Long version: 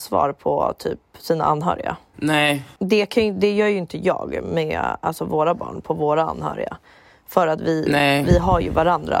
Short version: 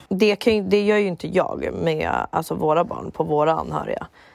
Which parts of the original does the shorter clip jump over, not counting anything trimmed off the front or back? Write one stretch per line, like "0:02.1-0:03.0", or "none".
none